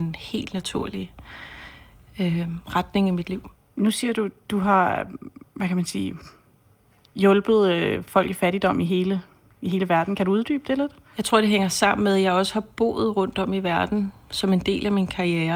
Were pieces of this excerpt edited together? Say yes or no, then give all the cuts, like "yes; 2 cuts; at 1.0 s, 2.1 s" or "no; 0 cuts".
no; 0 cuts